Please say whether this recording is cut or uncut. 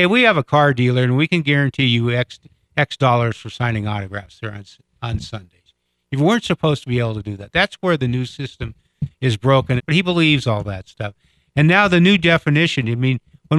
cut